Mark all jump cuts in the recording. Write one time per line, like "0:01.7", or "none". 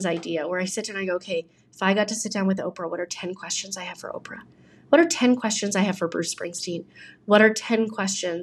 none